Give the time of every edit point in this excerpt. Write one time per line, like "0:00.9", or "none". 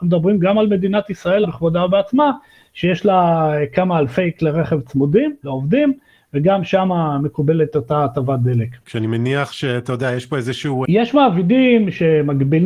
0:08.8
0:10.8